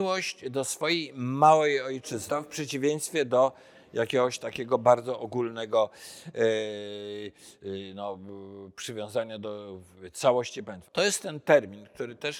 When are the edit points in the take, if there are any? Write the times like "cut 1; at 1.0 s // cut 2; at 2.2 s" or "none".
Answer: cut 1; at 2.3 s // cut 2; at 10.8 s